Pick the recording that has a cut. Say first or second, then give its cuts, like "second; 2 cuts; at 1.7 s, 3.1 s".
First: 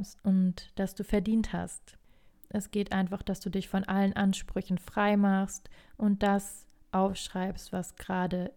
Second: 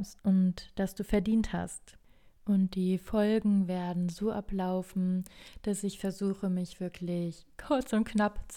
first; 1 cut; at 2.3 s